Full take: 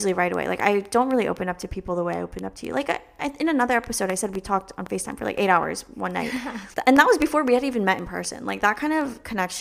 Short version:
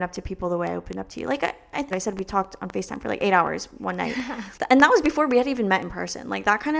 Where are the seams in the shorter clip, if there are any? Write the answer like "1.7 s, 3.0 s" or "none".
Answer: 1.9 s